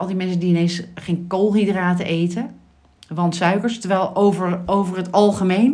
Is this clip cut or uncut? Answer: uncut